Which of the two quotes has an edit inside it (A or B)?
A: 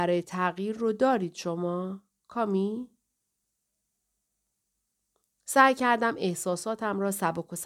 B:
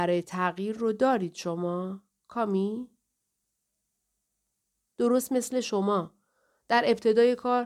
B